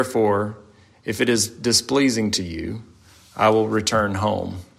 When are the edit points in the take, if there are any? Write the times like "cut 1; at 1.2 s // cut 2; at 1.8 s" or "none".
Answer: none